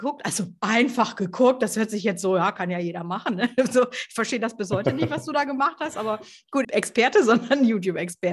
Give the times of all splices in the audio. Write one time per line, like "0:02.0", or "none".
0:06.6

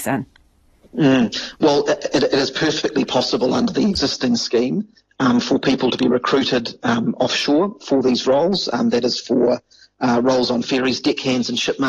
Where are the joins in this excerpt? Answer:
none

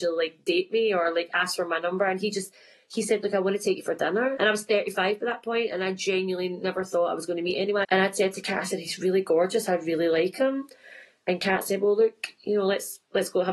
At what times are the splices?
0:04.4
0:07.8

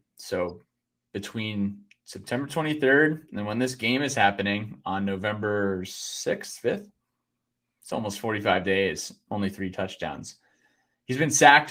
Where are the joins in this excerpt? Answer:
none

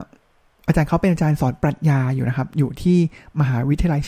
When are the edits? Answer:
none

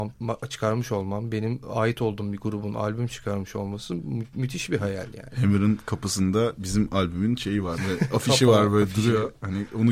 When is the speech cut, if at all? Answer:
0:07.8

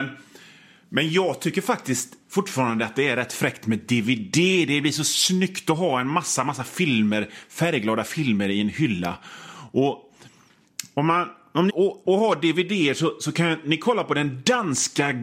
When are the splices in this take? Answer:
0:11.7

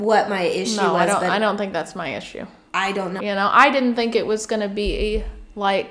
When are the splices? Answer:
0:03.2

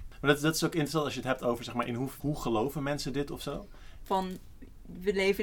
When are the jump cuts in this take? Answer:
0:02.2
0:04.0

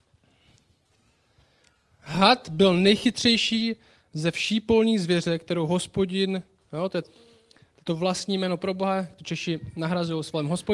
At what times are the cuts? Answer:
0:07.0

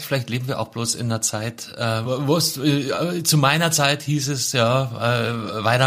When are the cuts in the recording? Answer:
none

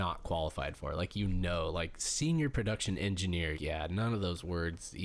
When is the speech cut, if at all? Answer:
0:03.5

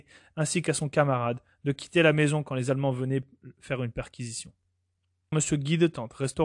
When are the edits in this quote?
0:05.3

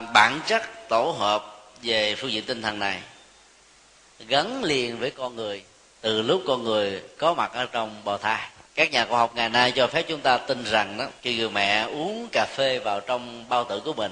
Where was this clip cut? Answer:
0:08.7
0:11.2

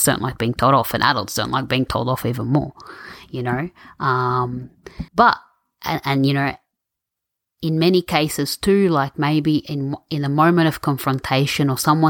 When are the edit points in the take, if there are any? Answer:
0:05.1

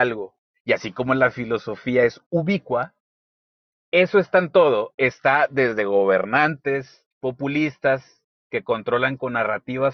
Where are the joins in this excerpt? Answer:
0:07.1

